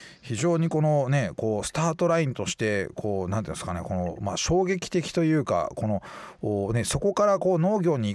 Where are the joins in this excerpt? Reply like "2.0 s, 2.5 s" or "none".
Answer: none